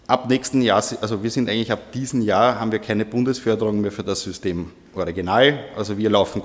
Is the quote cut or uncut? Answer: uncut